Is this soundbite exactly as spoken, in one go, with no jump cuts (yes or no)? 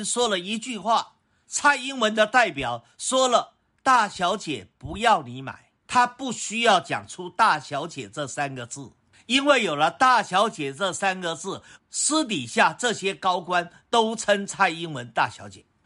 no